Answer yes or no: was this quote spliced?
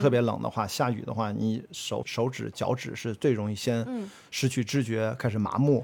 yes